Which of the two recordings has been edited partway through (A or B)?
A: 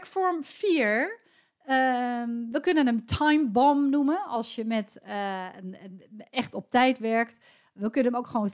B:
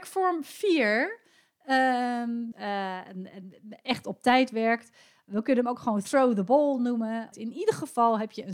B